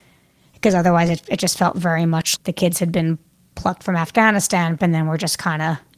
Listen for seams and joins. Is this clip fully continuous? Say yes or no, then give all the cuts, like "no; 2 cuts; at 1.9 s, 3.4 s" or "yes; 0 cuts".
no; 2 cuts; at 2.4 s, 4.8 s